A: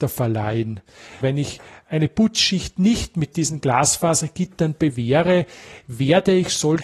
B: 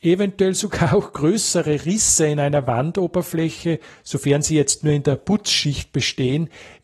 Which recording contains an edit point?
A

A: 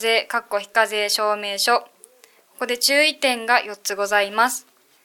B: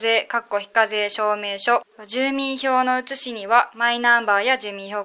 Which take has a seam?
B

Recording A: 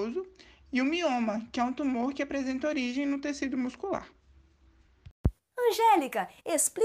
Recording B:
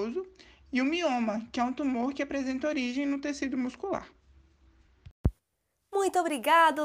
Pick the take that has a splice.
A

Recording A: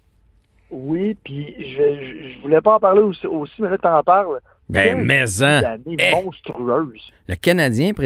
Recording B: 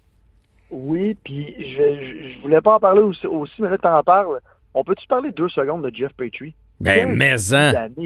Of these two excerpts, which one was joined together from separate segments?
A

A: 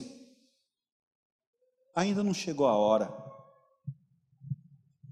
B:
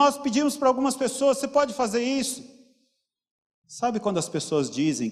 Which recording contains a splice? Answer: B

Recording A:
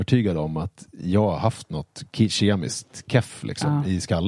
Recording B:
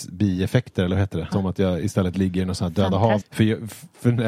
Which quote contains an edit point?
B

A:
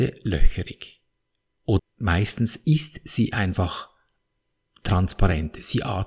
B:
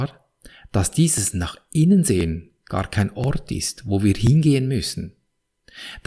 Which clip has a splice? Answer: A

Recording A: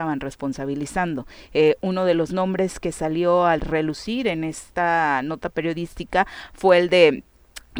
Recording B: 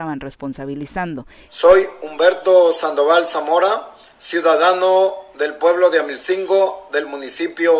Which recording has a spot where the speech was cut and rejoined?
B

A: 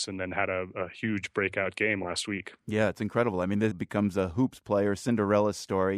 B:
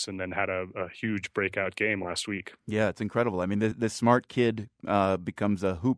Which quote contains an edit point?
A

